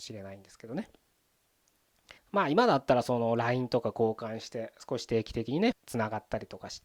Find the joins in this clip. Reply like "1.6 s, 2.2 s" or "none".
2.2 s, 5.7 s